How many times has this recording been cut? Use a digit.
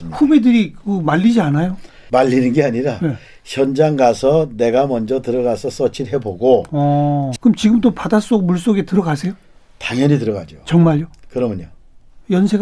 1